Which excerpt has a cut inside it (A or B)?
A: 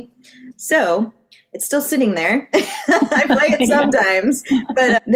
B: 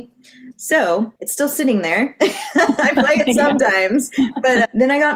B